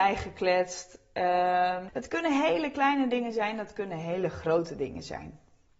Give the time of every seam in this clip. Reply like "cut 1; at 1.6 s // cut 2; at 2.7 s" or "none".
cut 1; at 1.9 s